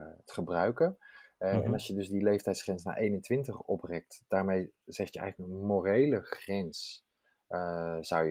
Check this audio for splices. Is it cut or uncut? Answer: uncut